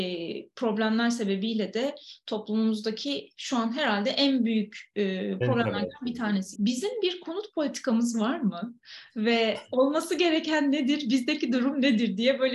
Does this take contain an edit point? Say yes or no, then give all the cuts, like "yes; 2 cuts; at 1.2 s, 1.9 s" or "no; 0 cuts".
yes; 1 cut; at 6.5 s